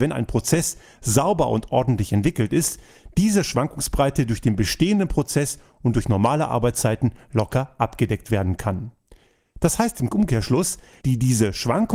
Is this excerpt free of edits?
no; 1 cut; at 11.0 s

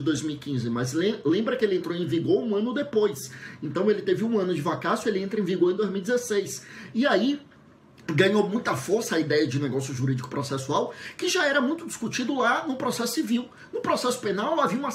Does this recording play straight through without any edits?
yes; 0 cuts

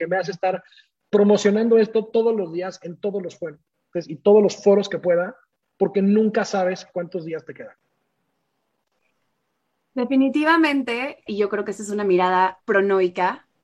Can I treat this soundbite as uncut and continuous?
no; 2 cuts; at 11.3 s, 12.6 s

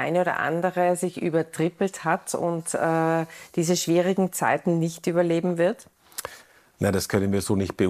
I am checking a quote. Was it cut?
no; 0 cuts

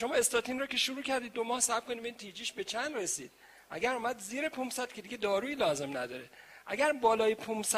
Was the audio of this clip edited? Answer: no; 0 cuts

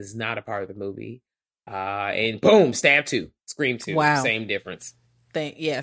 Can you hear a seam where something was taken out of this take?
yes; 1 cut; at 3.4 s

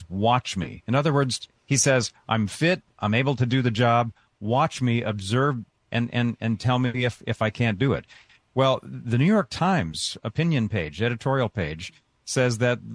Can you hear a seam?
no; 0 cuts

